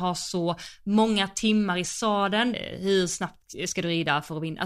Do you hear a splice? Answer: yes; 1 cut; at 2.5 s

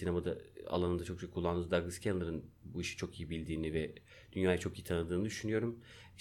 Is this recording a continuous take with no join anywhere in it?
yes; 0 cuts

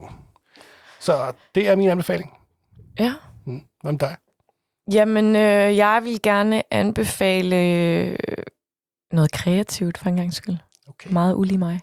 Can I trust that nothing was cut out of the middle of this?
yes; 0 cuts

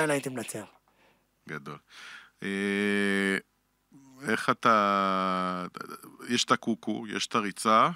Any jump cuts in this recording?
no; 0 cuts

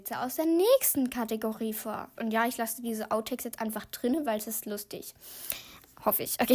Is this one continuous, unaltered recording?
no; 1 cut; at 2.1 s

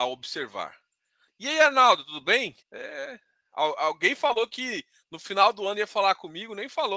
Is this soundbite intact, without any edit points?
no; 1 cut; at 2.6 s

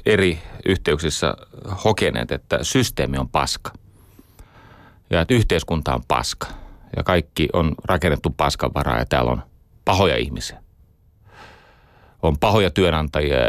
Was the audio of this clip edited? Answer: no; 0 cuts

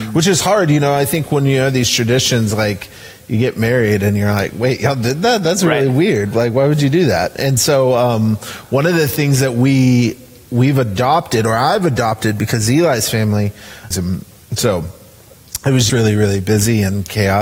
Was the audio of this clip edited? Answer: yes; 2 cuts; at 13.9 s, 15.9 s

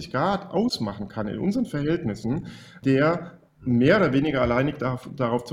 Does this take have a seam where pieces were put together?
no; 0 cuts

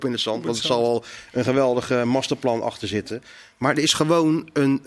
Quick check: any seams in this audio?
no; 0 cuts

